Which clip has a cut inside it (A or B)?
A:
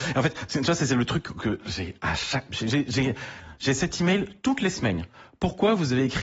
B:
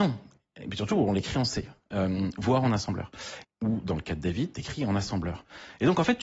B